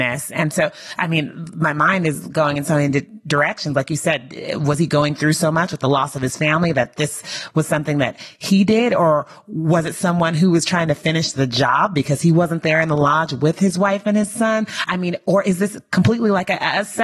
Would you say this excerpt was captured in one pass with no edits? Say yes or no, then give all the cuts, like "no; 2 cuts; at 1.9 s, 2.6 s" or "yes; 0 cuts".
yes; 0 cuts